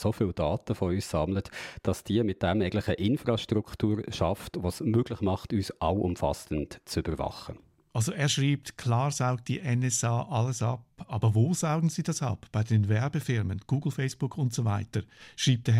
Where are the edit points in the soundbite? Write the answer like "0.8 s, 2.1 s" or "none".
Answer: none